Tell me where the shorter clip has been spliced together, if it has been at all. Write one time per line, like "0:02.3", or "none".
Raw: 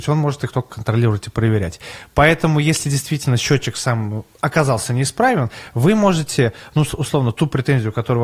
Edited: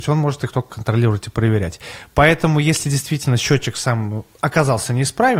none